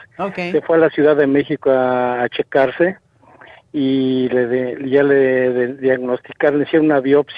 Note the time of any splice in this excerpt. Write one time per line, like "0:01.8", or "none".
none